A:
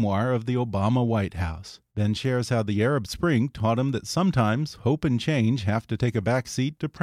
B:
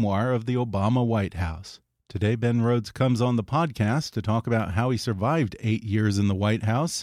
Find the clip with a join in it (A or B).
A